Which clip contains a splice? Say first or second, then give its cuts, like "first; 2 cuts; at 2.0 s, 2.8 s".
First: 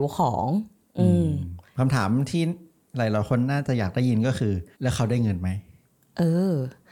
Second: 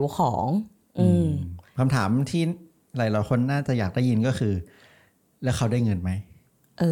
first; 1 cut; at 4.7 s